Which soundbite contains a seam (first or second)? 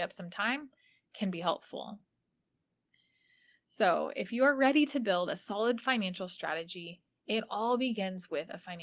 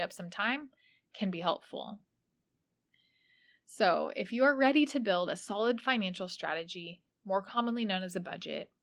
second